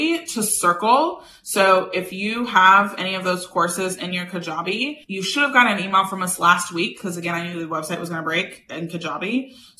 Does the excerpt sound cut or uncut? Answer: uncut